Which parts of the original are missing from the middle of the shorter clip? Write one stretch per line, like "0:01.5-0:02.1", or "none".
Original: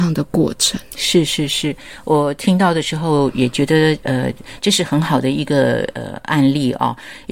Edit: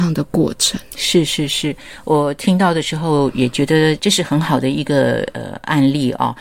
0:04.0-0:04.6

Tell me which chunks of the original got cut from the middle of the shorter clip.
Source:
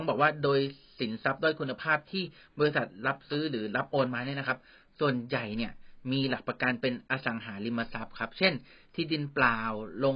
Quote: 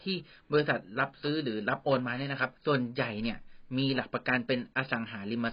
0:04.6-0:04.9

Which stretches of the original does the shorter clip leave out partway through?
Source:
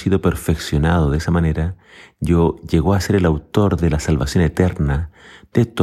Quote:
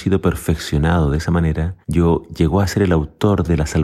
0:01.8-0:02.1

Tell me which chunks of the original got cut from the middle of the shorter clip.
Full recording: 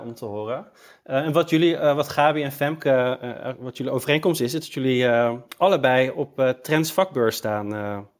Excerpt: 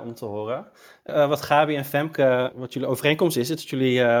0:01.1-0:01.8
0:03.2-0:03.6

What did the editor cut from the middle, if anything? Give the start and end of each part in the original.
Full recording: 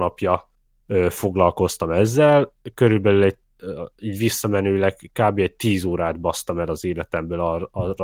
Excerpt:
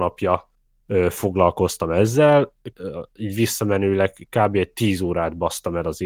0:02.7-0:03.5

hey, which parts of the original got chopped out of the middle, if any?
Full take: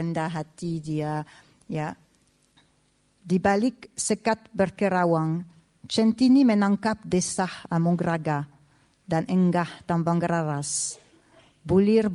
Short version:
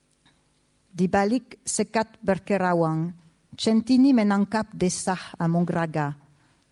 none

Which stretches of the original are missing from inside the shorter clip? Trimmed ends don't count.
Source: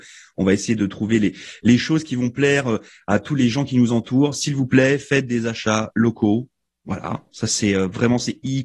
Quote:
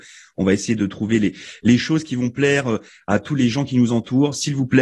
none

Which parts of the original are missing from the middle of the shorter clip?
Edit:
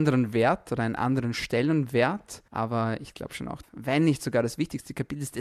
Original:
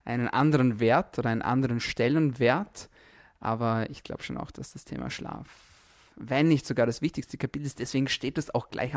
0:02.9-0:03.4
0:04.5-0:06.1

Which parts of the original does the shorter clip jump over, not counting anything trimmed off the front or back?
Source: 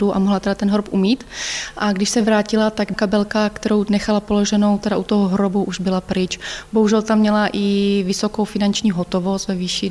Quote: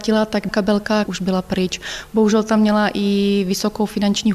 0:03.5-0:05.6

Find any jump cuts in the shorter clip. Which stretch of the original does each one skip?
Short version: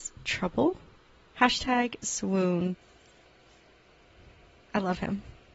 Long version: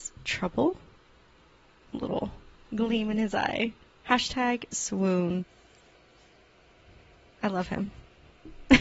0:01.3-0:04.0

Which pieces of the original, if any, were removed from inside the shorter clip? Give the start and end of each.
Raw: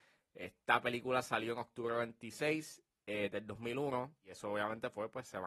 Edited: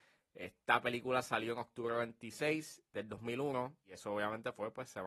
0:02.9-0:03.3

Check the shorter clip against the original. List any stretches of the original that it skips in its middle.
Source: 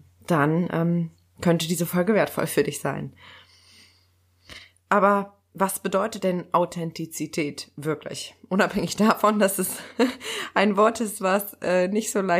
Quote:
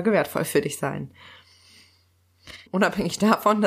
0:04.7-0:08.4

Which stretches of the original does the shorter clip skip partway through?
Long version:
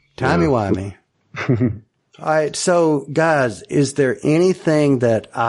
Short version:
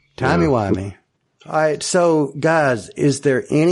0:01.2-0:01.9

